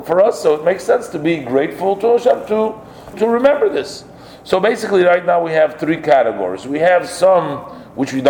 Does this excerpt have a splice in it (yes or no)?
yes